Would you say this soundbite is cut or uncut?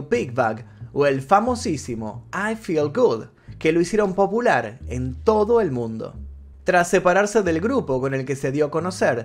uncut